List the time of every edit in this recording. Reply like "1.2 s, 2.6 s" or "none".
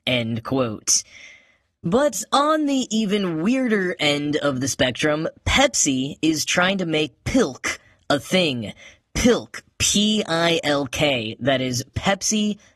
none